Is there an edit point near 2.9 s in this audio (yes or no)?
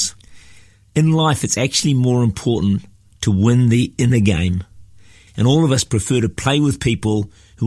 no